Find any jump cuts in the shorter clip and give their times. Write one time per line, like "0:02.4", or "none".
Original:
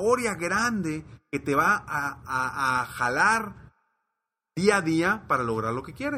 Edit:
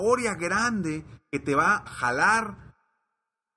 0:01.9